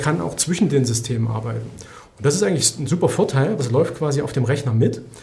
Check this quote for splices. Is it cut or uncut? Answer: cut